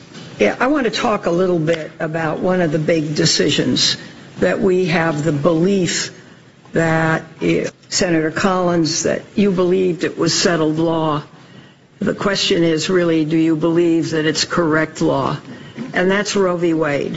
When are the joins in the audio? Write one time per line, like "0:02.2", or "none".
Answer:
0:07.7

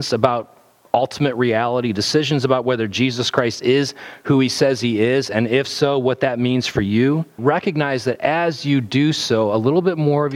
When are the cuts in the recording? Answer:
0:07.4

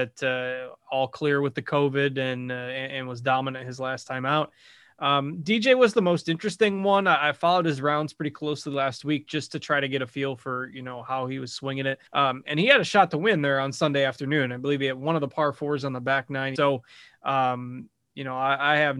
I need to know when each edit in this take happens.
0:12.1
0:16.6

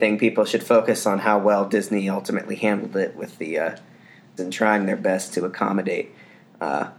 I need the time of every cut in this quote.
0:04.4

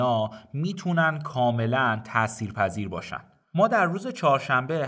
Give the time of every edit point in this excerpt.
none

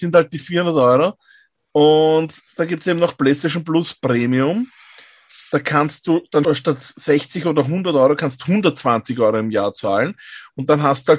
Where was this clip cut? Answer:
0:06.4

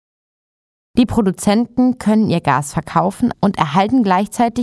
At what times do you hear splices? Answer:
0:03.3

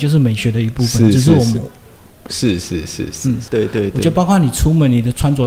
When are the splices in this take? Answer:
0:02.3
0:03.5

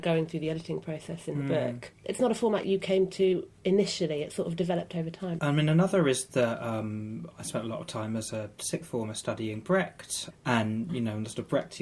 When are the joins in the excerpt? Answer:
0:05.4

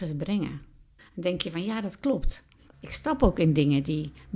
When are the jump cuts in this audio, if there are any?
0:01.0
0:02.7

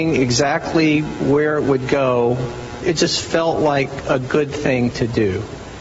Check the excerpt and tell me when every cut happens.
0:02.8

